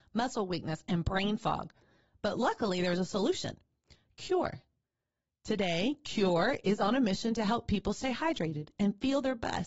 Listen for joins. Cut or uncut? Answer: uncut